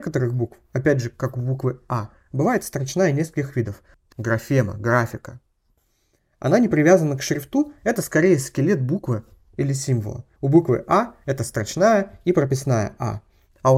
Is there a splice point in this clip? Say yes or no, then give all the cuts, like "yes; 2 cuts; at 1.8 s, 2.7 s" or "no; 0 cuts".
yes; 2 cuts; at 4.1 s, 10.4 s